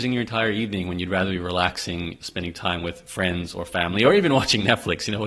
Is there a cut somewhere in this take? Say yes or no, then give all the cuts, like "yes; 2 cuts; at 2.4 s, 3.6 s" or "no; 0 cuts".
no; 0 cuts